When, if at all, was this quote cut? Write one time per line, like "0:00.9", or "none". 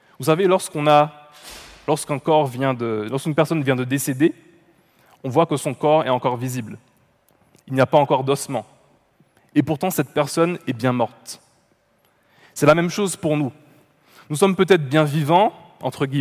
none